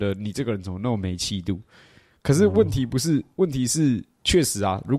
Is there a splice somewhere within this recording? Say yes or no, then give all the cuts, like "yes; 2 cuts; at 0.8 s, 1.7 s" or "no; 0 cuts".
no; 0 cuts